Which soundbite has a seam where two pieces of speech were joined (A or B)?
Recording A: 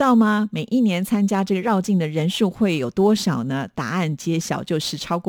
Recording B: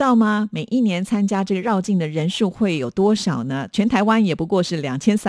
B